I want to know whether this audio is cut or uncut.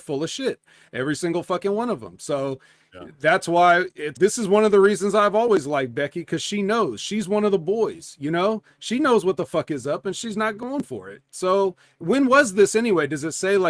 cut